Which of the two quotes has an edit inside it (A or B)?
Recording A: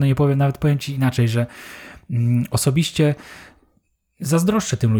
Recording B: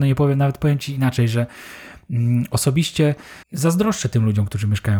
B